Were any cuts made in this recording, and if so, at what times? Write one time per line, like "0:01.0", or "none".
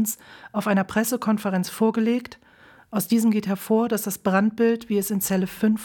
none